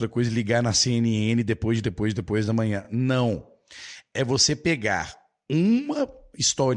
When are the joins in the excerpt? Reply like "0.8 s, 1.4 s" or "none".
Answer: none